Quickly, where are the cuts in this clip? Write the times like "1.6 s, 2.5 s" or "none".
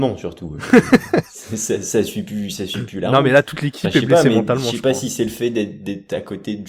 none